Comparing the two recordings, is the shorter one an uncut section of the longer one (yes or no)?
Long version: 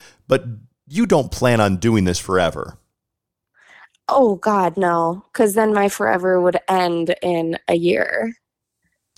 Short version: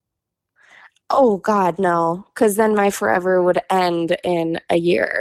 yes